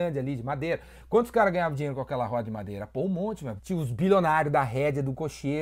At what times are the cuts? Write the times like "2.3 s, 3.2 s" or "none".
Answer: 3.6 s